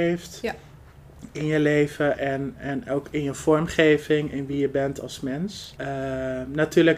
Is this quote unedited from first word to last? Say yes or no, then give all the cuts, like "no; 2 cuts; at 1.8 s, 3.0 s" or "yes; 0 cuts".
no; 1 cut; at 5.7 s